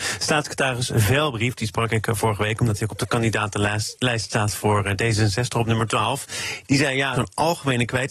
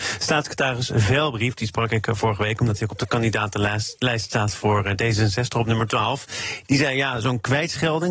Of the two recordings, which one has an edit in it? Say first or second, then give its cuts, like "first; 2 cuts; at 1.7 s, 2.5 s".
first; 1 cut; at 7.1 s